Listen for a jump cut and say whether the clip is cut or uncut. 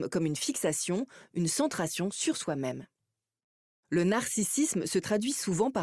uncut